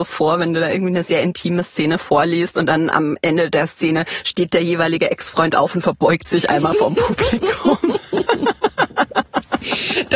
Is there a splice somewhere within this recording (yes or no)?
no